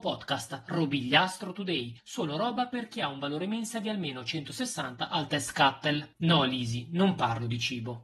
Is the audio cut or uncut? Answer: uncut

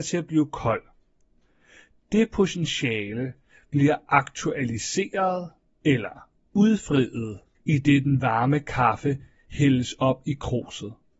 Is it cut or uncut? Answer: cut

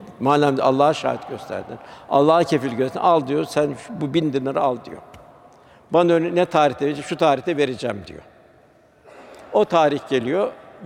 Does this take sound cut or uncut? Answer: uncut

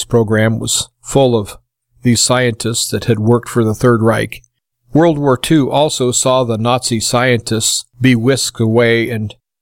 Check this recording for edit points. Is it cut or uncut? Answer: cut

